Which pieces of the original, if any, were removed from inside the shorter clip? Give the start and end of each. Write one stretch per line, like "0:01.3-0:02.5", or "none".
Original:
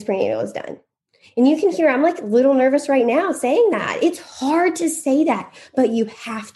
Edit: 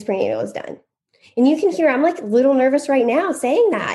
none

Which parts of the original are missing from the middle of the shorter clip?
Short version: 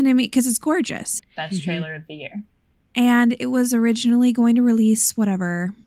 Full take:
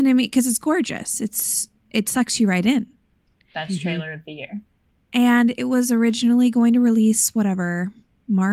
0:01.2-0:03.4

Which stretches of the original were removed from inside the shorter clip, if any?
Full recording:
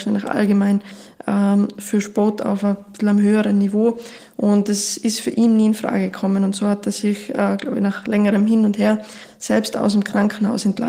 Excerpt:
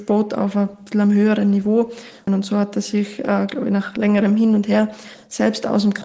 0:04.3-0:06.4

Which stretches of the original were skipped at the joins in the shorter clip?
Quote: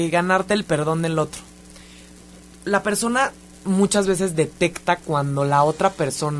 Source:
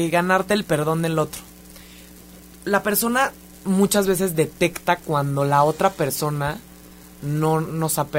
none

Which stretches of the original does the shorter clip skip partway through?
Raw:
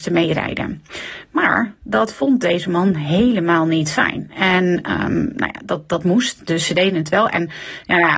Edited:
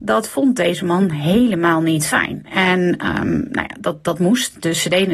none

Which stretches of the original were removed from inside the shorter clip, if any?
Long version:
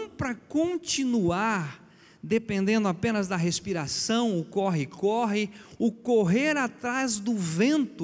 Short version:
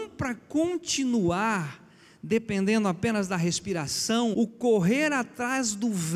0:04.3-0:05.8

